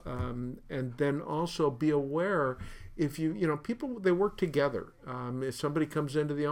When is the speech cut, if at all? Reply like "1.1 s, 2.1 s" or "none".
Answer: none